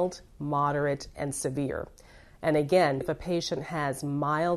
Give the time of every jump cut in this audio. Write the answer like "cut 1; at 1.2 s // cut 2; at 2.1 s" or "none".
cut 1; at 3.0 s